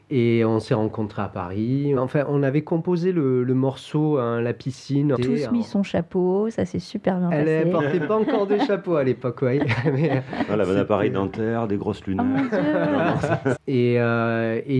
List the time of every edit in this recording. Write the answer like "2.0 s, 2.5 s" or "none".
2.0 s, 5.2 s, 13.6 s